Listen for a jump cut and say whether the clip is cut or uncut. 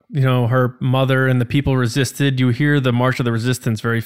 uncut